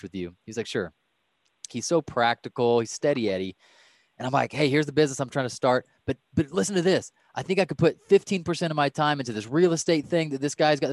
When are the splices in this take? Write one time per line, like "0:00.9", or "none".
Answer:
0:01.7